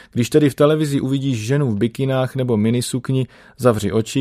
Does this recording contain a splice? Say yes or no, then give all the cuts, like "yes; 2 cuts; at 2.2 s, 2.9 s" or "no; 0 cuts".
no; 0 cuts